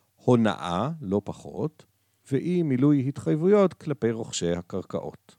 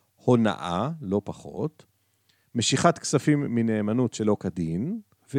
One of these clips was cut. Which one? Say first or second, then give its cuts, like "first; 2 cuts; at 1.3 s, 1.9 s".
first; 1 cut; at 2.2 s